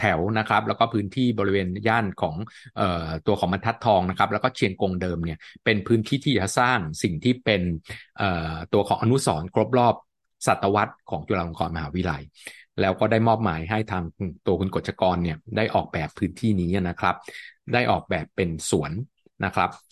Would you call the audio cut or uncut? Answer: uncut